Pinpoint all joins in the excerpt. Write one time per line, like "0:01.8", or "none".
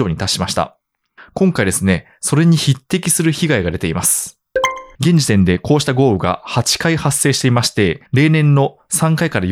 0:04.9
0:08.1